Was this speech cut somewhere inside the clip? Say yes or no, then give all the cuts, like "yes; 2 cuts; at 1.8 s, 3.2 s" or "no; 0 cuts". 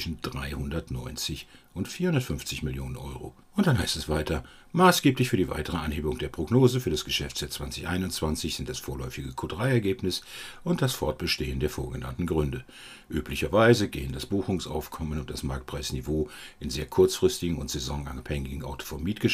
yes; 1 cut; at 3.4 s